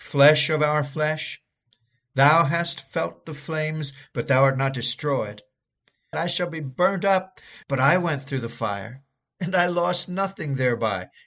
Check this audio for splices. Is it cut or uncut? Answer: cut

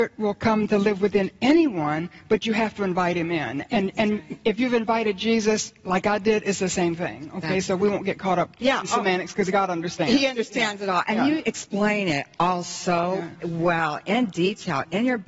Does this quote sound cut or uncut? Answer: uncut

